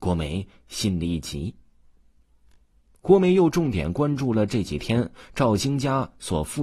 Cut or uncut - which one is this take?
uncut